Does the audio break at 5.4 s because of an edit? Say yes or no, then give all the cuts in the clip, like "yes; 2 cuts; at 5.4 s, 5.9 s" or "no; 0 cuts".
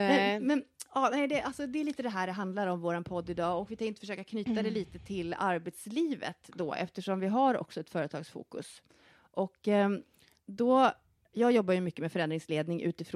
no; 0 cuts